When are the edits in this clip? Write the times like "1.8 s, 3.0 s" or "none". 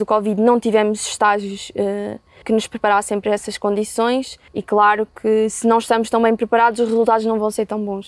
2.4 s, 4.5 s